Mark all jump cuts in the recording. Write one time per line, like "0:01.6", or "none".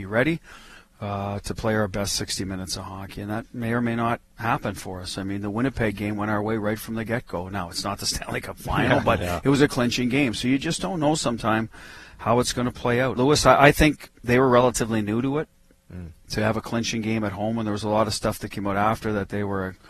0:13.2